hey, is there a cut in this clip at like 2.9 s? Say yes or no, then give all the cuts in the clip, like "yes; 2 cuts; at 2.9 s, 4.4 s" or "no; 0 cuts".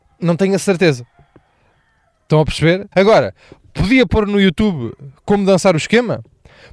yes; 1 cut; at 2.9 s